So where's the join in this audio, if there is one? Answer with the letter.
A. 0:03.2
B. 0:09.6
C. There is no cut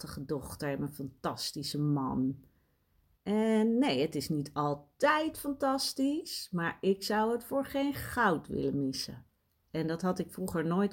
A